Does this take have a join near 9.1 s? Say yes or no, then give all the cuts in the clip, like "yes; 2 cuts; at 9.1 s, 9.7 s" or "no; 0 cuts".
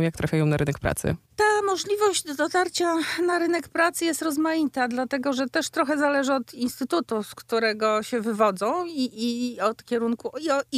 yes; 1 cut; at 9.1 s